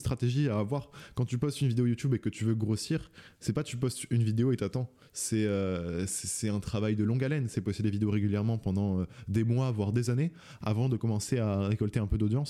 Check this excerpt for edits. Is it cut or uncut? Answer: uncut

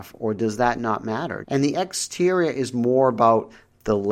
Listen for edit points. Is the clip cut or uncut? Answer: cut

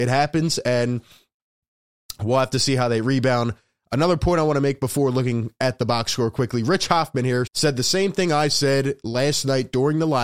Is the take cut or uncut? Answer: cut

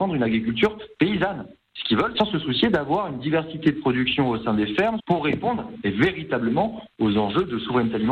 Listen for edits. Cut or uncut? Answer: cut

